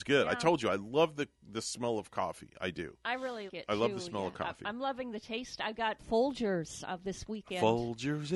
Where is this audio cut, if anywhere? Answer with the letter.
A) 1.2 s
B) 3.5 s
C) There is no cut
B